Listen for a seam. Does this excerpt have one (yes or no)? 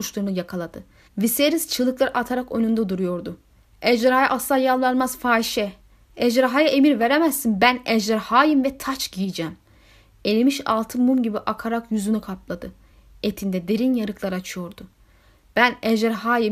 yes